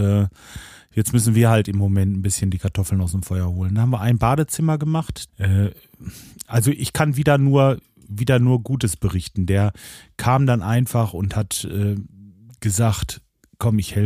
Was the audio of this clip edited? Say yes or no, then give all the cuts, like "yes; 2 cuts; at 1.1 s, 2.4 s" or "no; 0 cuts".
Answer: yes; 1 cut; at 5.3 s